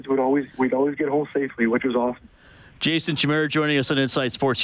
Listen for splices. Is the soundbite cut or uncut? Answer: uncut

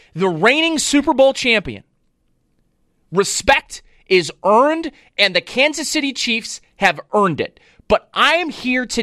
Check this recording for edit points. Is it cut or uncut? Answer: uncut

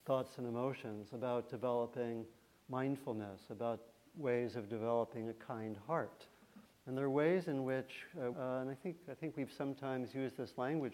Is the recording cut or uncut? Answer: cut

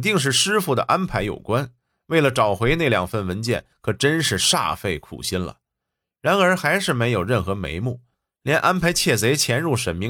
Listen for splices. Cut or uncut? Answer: uncut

